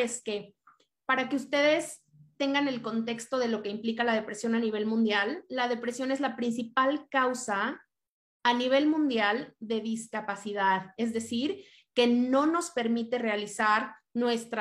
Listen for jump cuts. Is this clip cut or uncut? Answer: uncut